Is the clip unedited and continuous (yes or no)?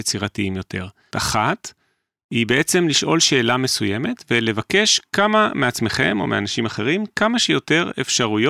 no